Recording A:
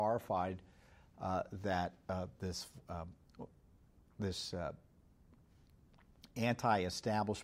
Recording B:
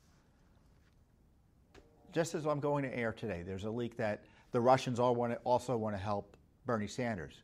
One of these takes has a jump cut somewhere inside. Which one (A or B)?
B